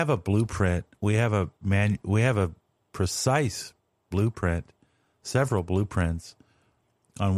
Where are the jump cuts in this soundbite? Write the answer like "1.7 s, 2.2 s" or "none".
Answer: none